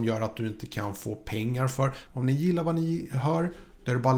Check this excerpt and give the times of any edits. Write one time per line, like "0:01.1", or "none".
0:02.1